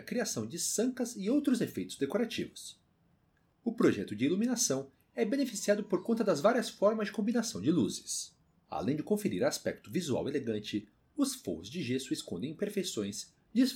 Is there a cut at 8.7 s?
yes; 1 cut; at 8.7 s

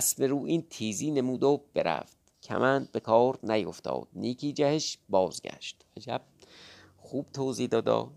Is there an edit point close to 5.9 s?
yes; 1 cut; at 5.9 s

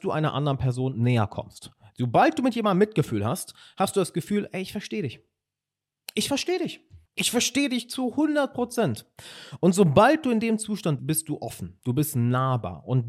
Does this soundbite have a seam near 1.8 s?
no; 2 cuts; at 7.1 s, 11.0 s

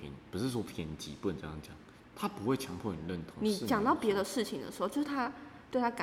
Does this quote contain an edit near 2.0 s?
yes; 1 cut; at 2.0 s

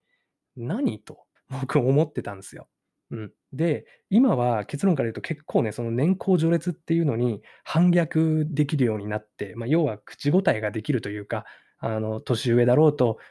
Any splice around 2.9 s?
no; 1 cut; at 1.4 s

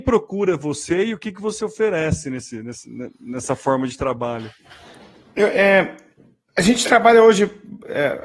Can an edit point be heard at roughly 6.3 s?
no; 0 cuts

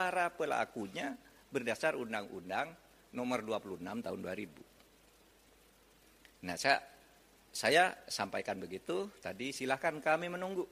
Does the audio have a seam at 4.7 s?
no; 0 cuts

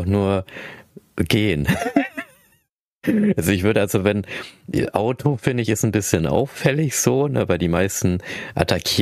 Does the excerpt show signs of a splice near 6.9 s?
no; 0 cuts

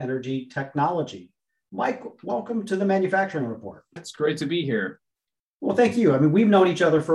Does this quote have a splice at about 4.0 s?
yes; 1 cut; at 4.0 s

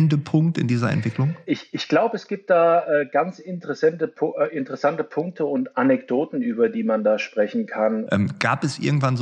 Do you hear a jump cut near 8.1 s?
yes; 1 cut; at 8.1 s

